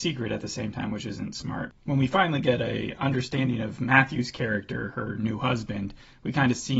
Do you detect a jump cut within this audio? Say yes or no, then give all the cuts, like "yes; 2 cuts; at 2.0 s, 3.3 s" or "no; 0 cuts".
yes; 1 cut; at 1.8 s